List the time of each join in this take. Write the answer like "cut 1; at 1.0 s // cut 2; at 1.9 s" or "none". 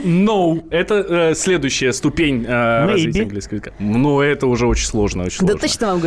none

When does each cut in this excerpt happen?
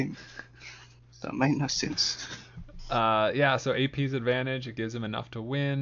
none

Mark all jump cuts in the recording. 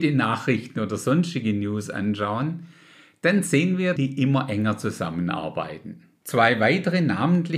cut 1; at 4.0 s // cut 2; at 6.2 s

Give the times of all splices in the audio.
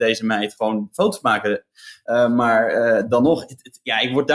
cut 1; at 2.1 s

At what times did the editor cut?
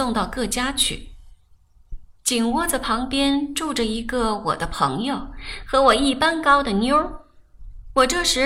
none

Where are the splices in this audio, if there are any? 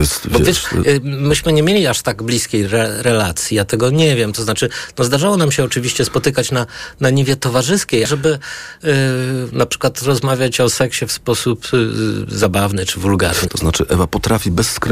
cut 1; at 8.1 s // cut 2; at 13.5 s

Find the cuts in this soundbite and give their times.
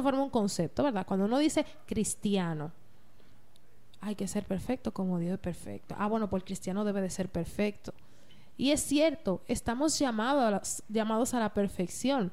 none

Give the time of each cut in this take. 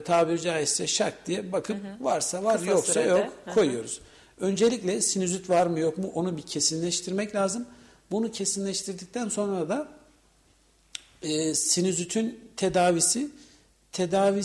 none

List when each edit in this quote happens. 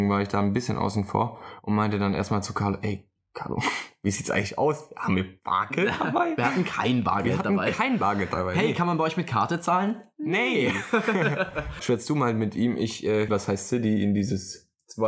cut 1; at 11.8 s // cut 2; at 13.3 s

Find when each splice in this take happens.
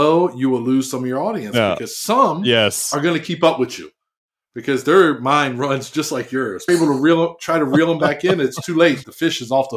cut 1; at 6.7 s

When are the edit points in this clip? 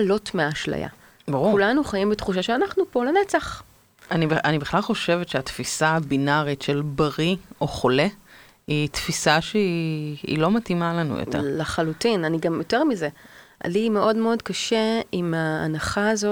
cut 1; at 1.2 s // cut 2; at 4.1 s

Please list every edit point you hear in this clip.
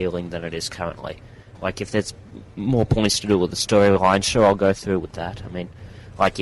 cut 1; at 1.5 s

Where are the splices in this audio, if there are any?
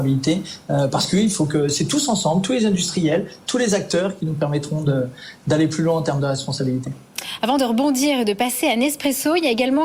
none

